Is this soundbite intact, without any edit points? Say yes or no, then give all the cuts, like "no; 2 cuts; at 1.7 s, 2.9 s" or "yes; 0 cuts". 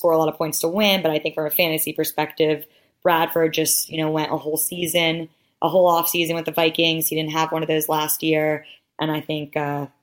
no; 1 cut; at 8.8 s